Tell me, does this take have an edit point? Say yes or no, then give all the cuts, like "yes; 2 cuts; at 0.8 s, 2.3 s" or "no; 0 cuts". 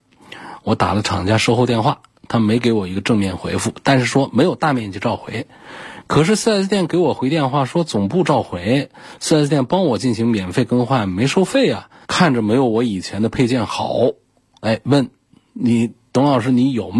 yes; 1 cut; at 12.0 s